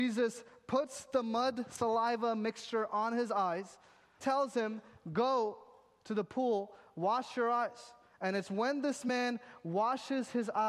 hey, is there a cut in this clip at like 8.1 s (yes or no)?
no